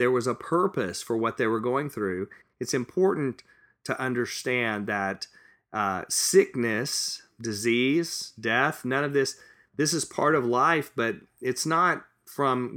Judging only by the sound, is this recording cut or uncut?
cut